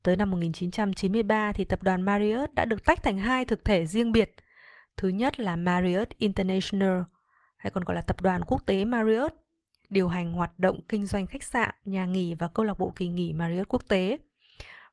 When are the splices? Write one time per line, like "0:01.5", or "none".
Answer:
none